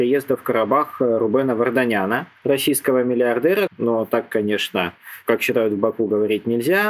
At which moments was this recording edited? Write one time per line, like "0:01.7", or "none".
0:02.4
0:03.7